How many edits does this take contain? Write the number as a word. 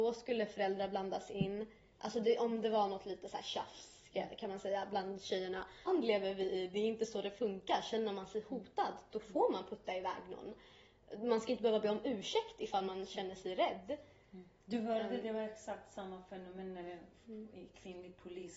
one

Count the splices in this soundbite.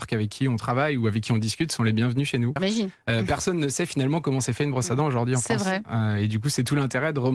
one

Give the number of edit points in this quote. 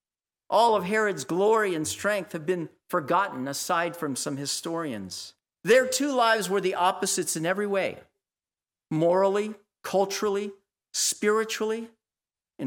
one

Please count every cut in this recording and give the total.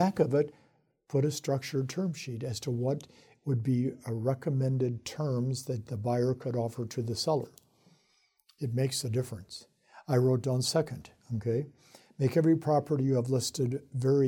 zero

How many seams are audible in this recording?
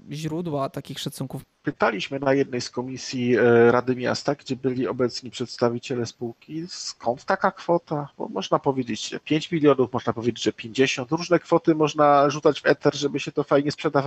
one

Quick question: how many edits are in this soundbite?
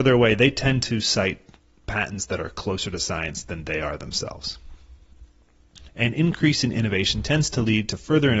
one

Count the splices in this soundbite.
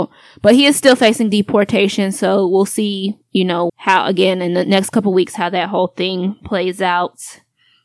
one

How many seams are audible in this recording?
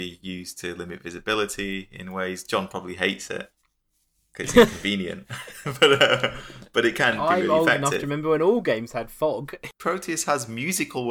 one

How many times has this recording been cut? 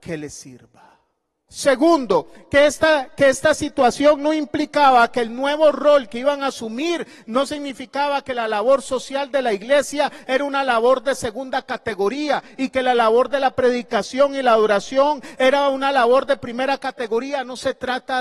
one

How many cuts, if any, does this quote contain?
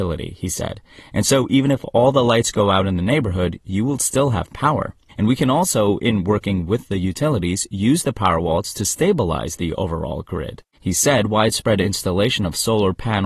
two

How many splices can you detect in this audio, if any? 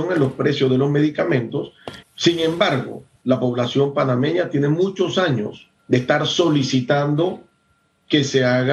three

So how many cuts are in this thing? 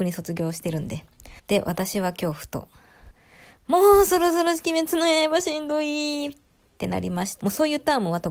two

